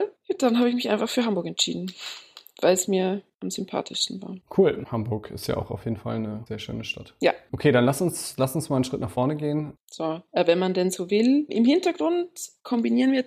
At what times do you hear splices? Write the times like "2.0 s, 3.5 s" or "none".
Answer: 9.8 s